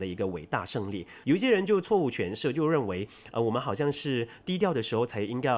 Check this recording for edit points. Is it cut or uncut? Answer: cut